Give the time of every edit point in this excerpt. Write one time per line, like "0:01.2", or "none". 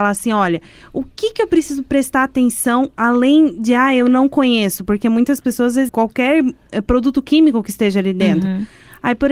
0:05.9